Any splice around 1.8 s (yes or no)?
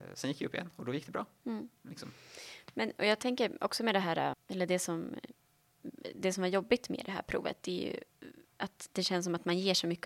no